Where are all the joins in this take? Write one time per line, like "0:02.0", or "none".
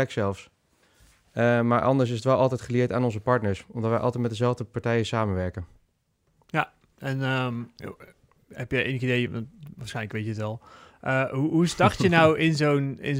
none